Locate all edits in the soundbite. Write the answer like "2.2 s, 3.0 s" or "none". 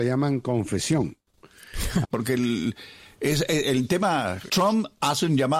2.0 s, 4.5 s

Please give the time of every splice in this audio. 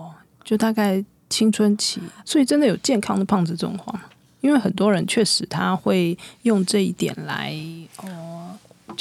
2.2 s

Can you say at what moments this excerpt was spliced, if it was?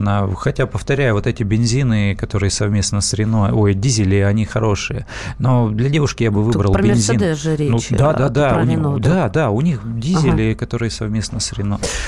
none

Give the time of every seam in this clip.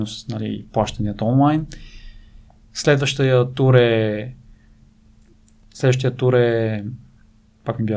none

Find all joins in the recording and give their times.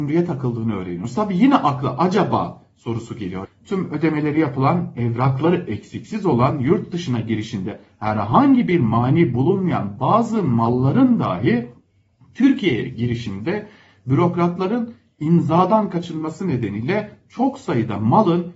3.4 s

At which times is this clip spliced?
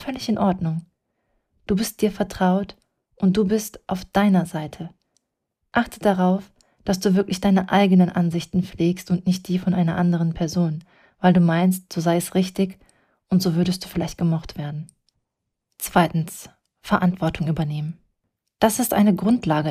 none

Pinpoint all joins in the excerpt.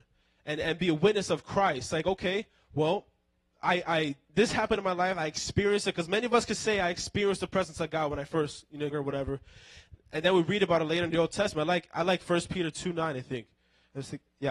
8.9 s

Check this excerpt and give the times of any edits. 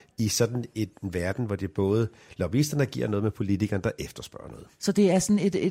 none

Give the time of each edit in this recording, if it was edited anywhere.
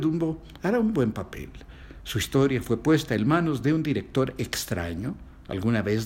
none

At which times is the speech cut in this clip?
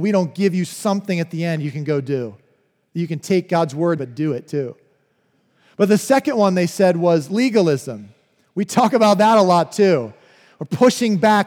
4.0 s

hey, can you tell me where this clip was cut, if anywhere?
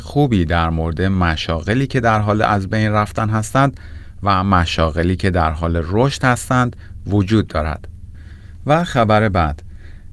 none

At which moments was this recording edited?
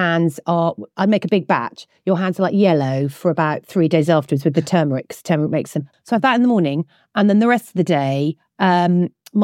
5.9 s

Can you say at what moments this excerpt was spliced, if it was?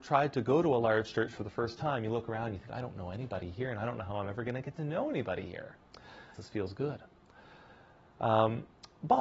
6.3 s

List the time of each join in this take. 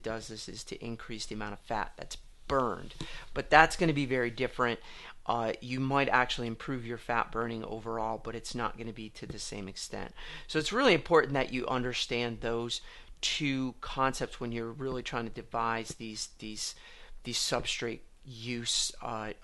none

